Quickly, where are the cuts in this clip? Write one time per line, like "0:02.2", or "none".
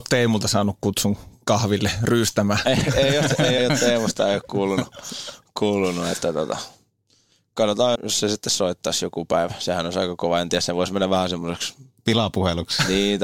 0:03.6
0:08.0